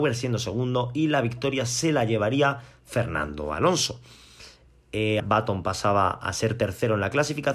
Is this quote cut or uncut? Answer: cut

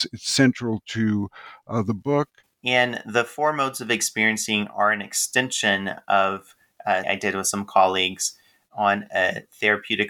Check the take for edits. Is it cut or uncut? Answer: cut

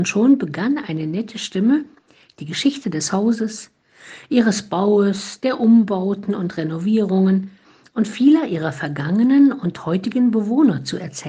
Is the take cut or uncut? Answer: uncut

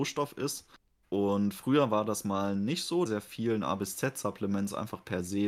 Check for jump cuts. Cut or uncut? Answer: cut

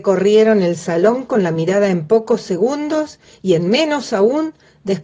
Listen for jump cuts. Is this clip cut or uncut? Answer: uncut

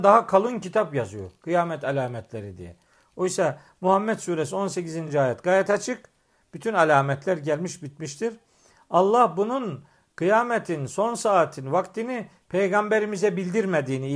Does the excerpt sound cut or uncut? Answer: uncut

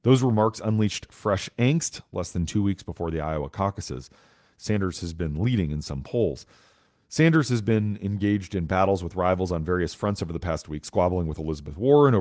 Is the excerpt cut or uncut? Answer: uncut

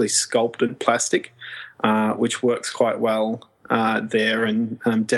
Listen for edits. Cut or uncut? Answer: uncut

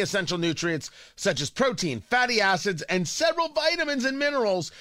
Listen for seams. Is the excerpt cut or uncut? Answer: uncut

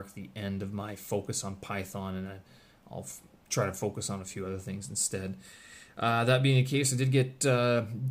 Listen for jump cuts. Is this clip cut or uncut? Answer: uncut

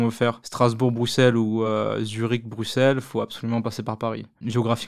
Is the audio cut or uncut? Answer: uncut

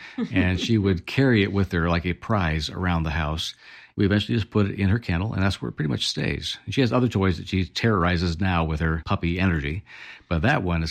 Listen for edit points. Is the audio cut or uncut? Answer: uncut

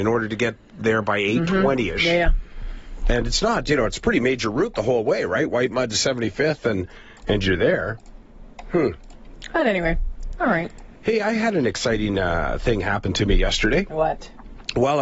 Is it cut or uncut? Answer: uncut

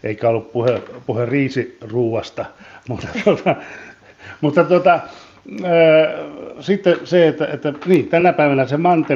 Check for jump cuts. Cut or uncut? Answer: uncut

